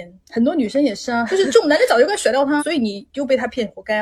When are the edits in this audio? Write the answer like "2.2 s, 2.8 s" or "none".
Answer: 1.3 s, 2.6 s

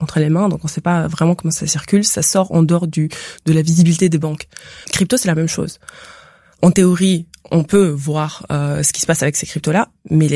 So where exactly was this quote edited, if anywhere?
none

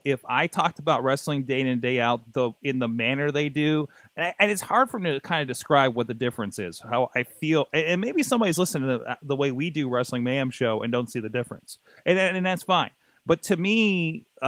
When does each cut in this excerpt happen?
none

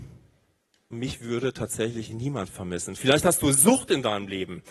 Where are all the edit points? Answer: 0.9 s

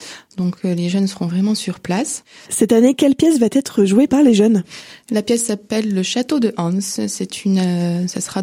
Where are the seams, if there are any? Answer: 2.5 s, 4.1 s

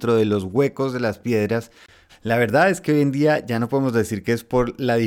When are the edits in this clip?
2.1 s

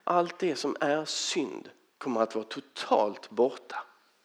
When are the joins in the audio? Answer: 1.9 s

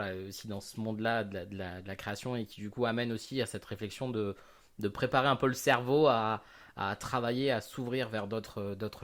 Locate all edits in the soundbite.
none

